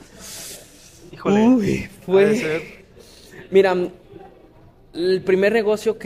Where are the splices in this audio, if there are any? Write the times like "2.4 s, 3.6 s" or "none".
none